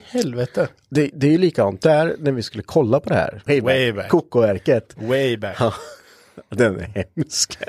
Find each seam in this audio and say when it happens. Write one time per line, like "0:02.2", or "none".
0:03.5